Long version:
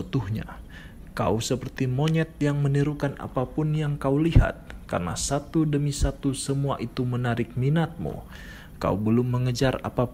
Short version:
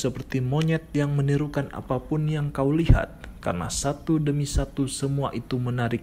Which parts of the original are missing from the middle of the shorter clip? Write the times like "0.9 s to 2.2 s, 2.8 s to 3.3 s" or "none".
none